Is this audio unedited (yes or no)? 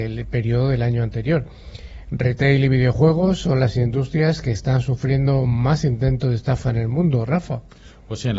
yes